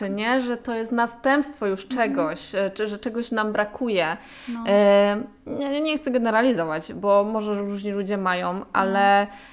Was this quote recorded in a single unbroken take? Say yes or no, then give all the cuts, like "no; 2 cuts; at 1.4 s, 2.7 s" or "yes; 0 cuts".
yes; 0 cuts